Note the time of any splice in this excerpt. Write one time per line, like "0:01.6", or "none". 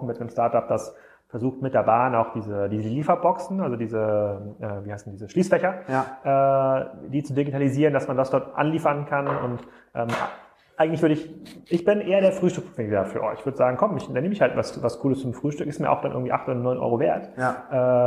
none